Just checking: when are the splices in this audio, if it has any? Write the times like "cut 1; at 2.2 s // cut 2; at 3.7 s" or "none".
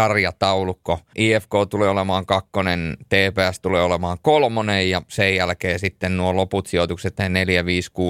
cut 1; at 1.1 s